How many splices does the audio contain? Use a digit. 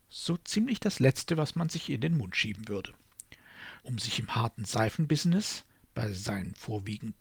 1